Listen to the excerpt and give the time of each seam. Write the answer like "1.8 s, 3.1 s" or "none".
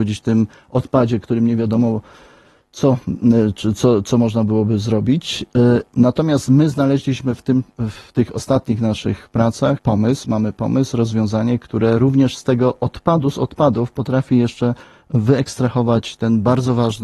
none